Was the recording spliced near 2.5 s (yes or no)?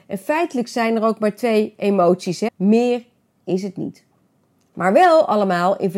yes